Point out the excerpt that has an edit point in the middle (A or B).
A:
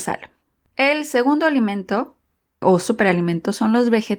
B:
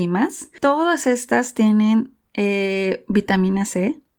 A